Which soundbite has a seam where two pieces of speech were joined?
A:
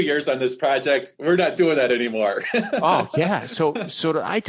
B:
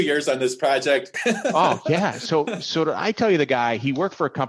B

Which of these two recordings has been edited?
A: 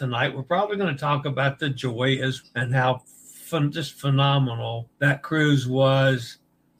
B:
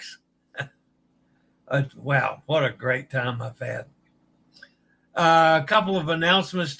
A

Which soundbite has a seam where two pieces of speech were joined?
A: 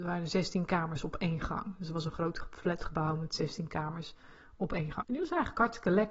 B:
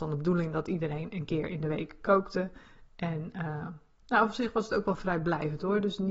A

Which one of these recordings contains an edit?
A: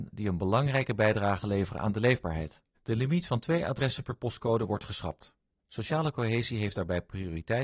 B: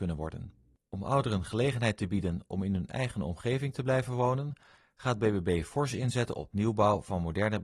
A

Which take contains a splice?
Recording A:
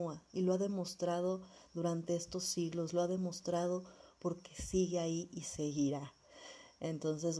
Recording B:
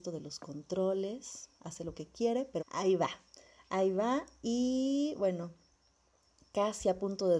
B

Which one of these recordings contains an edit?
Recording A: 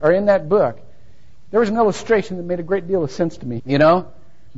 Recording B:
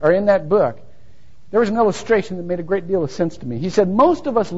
A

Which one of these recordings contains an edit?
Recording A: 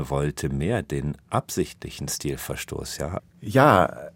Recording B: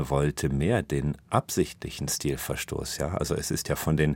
A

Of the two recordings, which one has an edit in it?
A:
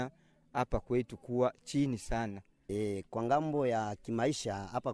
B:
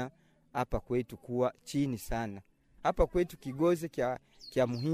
A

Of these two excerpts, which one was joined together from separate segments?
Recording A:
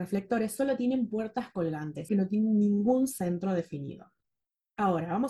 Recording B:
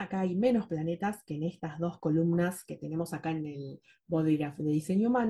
A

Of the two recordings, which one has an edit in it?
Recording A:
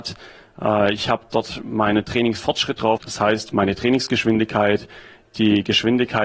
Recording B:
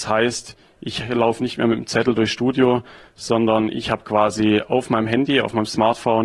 A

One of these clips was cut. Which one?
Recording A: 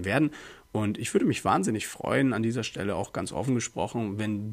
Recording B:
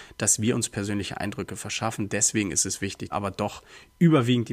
B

